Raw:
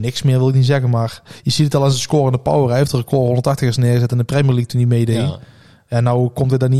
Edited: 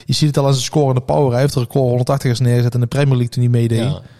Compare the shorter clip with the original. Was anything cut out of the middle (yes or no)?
no